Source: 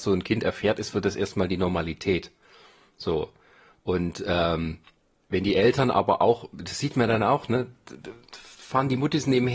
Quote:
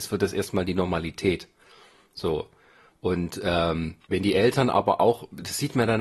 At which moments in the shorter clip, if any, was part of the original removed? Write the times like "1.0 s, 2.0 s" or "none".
4.0 s